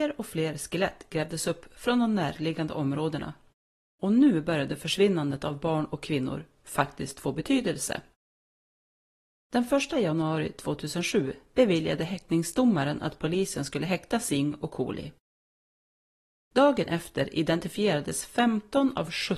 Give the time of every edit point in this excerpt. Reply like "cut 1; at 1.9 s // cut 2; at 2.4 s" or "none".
cut 1; at 9.4 s